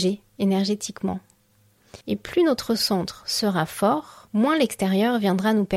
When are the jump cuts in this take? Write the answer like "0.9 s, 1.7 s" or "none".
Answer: 2.0 s, 4.3 s